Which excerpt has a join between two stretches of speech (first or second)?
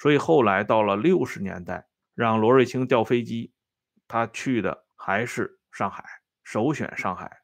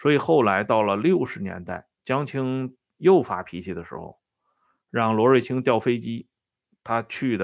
first